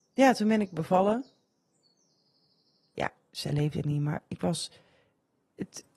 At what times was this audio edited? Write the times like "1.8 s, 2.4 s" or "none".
2.9 s